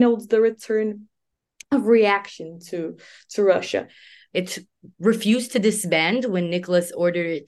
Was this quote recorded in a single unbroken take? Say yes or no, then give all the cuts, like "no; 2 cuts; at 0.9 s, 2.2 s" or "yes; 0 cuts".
no; 1 cut; at 4.3 s